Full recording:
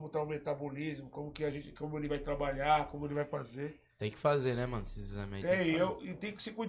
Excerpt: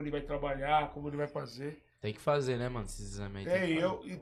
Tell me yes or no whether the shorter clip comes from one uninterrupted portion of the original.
yes